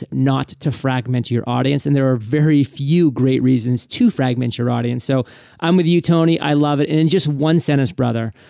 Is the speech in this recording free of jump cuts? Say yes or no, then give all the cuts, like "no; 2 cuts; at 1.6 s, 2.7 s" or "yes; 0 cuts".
yes; 0 cuts